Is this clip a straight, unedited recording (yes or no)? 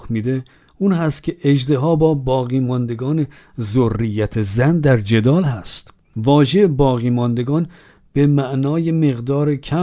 yes